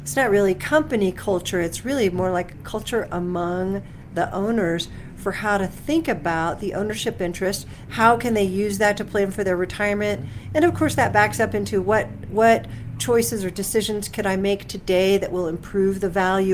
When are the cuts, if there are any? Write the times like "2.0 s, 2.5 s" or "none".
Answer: 7.9 s